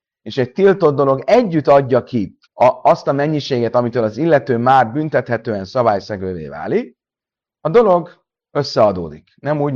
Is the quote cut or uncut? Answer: cut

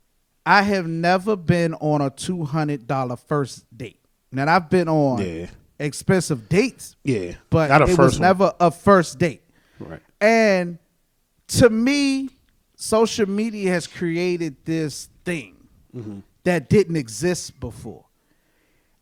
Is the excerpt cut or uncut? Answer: uncut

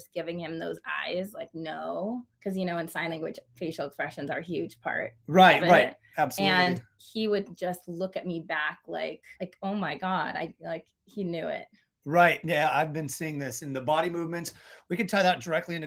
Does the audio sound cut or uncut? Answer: cut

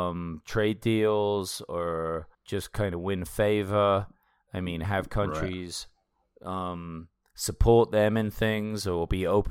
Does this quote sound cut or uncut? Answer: cut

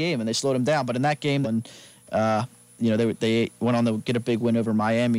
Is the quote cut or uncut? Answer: cut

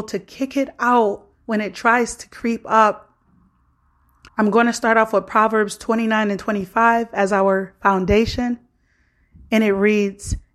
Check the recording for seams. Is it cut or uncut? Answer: cut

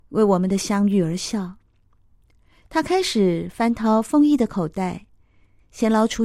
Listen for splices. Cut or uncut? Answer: uncut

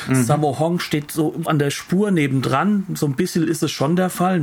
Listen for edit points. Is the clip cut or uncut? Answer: cut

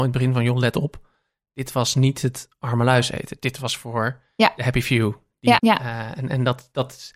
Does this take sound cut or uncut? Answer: cut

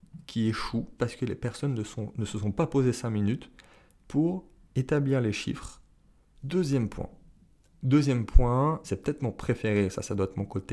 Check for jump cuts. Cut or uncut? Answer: cut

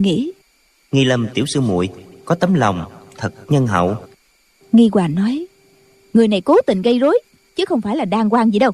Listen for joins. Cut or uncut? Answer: uncut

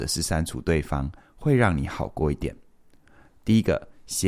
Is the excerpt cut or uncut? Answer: cut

